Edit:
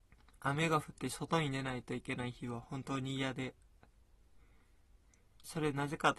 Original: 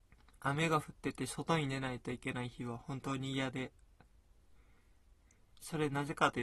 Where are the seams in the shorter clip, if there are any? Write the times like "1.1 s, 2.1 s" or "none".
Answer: 0.9 s